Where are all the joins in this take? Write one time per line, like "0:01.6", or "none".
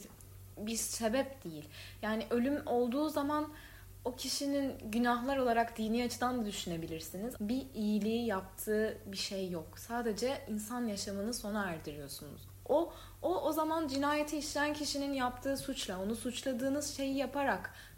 0:07.3